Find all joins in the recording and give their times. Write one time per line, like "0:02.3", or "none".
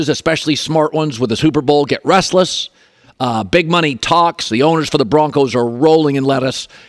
none